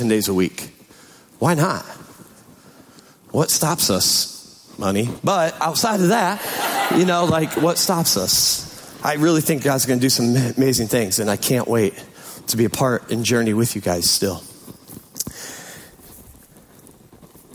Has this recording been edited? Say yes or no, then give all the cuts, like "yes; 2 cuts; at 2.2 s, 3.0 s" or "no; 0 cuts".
no; 0 cuts